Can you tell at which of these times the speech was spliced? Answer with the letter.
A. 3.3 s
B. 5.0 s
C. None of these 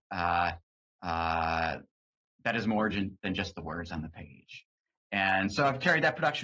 C